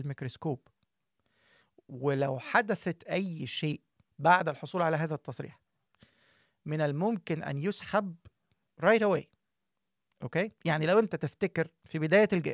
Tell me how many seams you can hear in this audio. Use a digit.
0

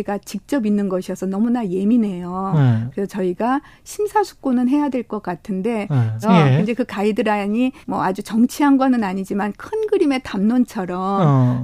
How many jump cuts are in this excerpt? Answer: 2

